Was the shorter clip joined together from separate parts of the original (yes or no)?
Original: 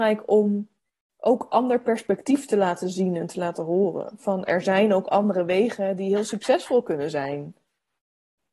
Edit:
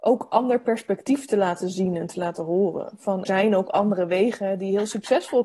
yes